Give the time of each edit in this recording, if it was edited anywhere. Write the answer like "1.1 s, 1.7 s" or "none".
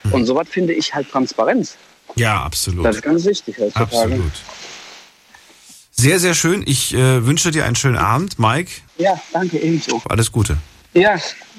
8.9 s, 10.0 s